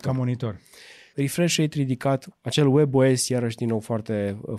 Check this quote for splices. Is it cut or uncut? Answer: cut